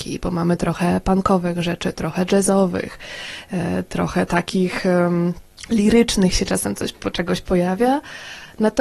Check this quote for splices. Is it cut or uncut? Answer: cut